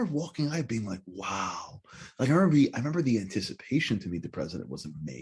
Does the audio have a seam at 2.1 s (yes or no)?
no